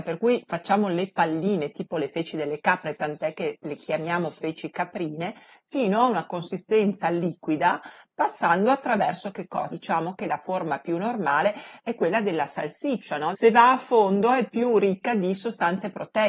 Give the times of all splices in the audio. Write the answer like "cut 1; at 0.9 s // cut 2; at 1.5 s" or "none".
cut 1; at 9.7 s // cut 2; at 13.3 s

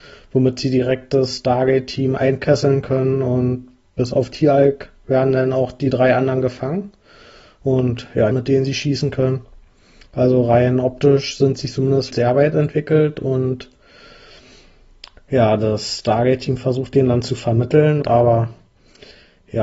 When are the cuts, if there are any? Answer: cut 1; at 8.3 s // cut 2; at 12.1 s // cut 3; at 18.0 s

